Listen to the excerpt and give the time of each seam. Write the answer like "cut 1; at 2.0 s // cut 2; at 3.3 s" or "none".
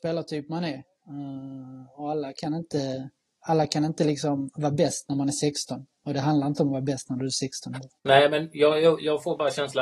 cut 1; at 8.0 s